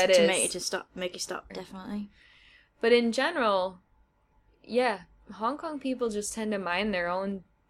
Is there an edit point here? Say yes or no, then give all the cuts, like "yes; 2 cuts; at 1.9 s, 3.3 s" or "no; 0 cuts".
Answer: yes; 1 cut; at 1.5 s